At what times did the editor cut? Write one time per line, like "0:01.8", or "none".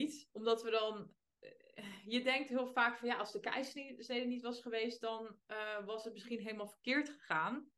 none